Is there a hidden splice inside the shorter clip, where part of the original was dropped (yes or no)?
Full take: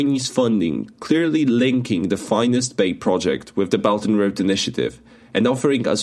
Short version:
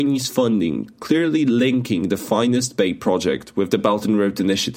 no